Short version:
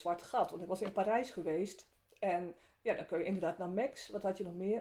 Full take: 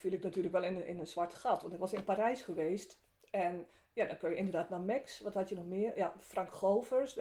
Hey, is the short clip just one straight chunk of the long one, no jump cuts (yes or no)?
yes